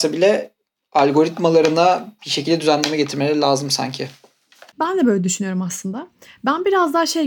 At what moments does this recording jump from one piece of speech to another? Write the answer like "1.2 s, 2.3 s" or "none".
none